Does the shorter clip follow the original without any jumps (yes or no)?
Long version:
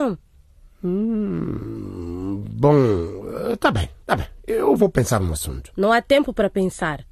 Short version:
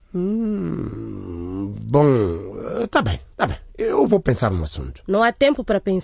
yes